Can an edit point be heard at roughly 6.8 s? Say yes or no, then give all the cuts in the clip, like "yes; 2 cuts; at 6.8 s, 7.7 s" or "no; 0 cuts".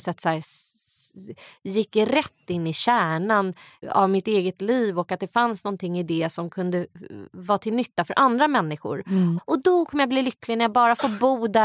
no; 2 cuts; at 3.8 s, 9.4 s